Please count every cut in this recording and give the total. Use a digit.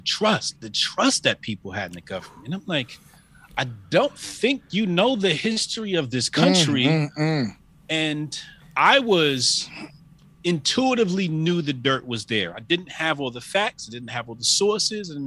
0